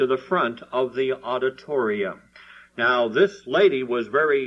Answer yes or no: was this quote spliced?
no